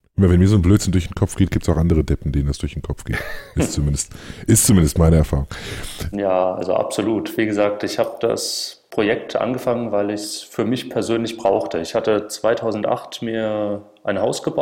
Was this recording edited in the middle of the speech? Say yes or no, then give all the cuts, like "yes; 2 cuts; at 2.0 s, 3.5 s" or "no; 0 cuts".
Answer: yes; 1 cut; at 6.1 s